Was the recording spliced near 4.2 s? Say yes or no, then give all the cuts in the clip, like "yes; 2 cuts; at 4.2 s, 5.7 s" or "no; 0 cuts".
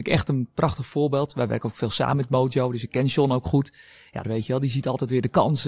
yes; 1 cut; at 4.2 s